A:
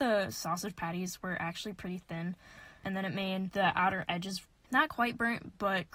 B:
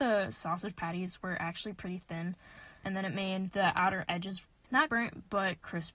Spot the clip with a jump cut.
B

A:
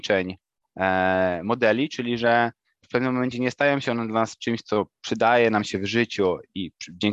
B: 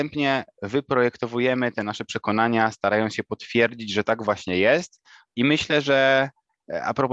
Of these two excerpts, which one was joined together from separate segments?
B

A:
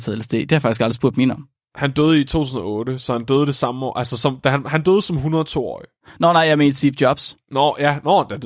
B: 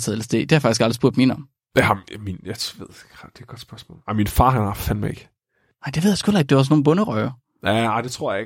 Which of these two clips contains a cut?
A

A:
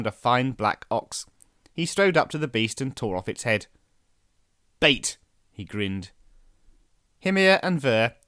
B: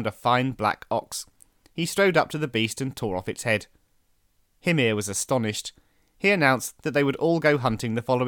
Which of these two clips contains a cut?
B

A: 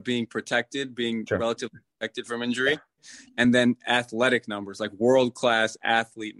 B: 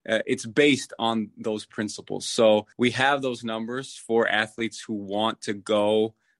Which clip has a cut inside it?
B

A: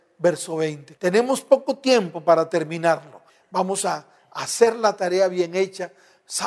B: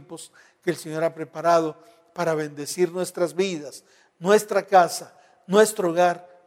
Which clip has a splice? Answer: A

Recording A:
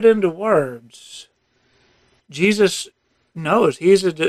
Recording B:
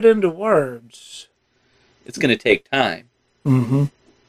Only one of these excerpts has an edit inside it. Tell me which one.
B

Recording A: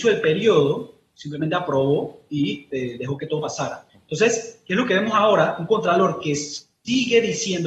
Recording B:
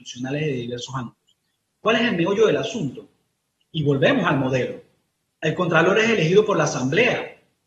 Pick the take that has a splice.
A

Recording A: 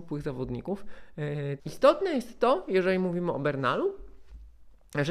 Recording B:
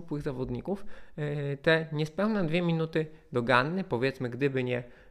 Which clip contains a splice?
A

